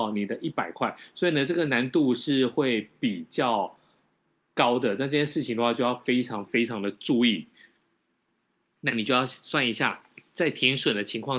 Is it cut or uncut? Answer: uncut